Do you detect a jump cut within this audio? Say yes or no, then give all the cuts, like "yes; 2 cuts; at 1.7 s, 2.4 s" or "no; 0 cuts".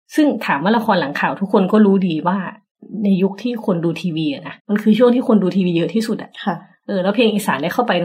yes; 1 cut; at 4.6 s